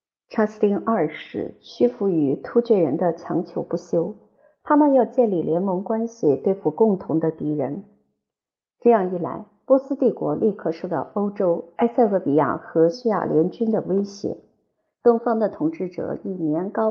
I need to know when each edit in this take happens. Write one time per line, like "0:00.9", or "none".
0:12.9